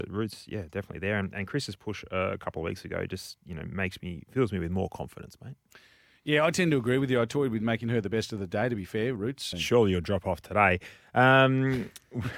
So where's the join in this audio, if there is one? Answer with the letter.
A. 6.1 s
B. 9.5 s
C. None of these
B